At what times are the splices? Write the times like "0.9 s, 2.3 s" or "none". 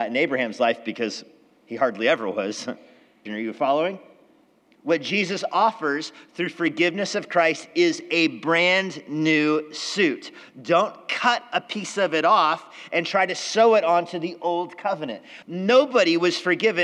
3.3 s, 15.4 s